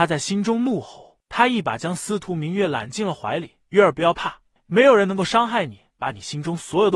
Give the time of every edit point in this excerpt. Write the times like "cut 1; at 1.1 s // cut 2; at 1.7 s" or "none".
cut 1; at 4.6 s